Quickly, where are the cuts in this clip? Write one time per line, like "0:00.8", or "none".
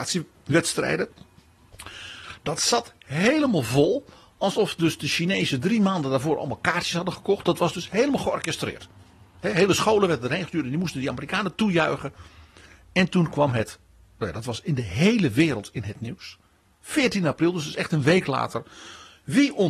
none